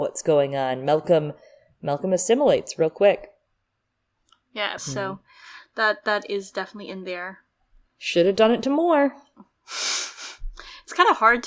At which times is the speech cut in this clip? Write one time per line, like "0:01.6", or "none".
0:04.8